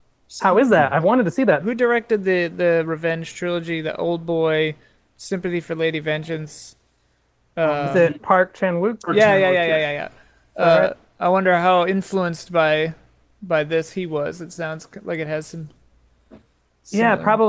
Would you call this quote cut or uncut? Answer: cut